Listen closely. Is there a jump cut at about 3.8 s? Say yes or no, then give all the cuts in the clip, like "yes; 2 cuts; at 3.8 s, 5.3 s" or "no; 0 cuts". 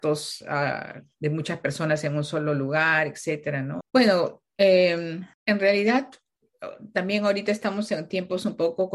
yes; 2 cuts; at 3.8 s, 5.3 s